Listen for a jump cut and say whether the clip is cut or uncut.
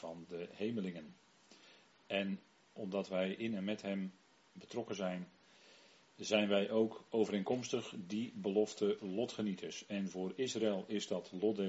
cut